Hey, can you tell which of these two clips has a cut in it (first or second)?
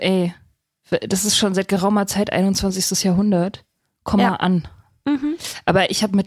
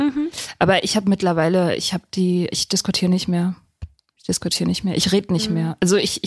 second